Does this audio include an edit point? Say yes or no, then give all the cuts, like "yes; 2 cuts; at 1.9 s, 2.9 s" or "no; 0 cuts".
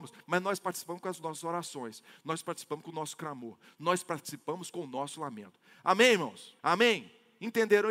yes; 1 cut; at 6.6 s